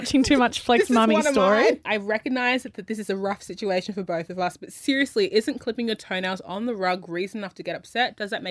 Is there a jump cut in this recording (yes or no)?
yes